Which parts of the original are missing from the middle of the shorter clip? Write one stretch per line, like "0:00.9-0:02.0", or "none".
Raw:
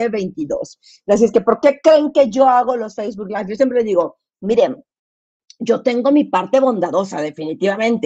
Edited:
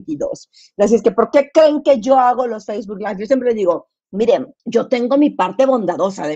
0:04.9-0:05.5